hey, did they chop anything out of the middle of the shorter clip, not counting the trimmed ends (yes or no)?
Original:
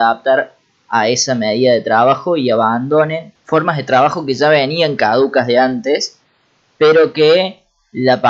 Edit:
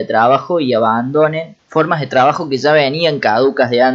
no